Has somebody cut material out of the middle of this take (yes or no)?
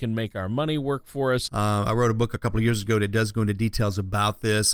yes